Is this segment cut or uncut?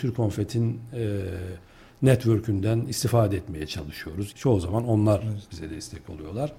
cut